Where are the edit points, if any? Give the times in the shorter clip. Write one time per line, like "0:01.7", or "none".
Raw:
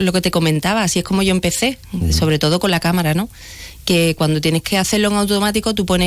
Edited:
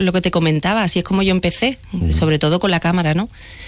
none